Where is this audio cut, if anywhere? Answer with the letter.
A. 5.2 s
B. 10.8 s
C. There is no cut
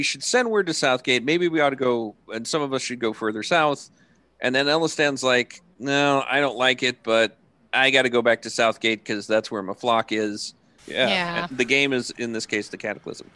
B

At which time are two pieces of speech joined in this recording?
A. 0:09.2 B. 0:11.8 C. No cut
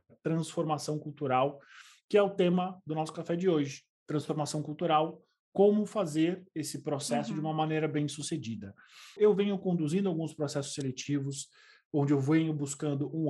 A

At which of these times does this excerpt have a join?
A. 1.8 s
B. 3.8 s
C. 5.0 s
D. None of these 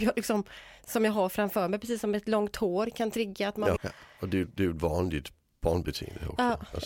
B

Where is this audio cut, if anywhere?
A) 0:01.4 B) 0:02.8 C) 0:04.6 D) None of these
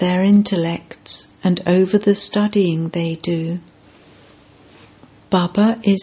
D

